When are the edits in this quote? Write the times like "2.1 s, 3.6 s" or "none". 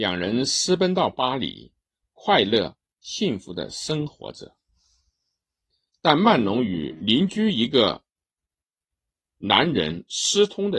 none